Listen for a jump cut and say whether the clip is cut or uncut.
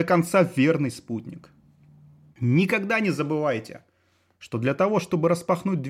cut